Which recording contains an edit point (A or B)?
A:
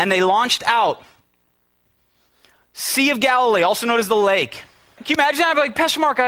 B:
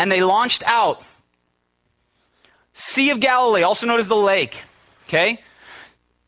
A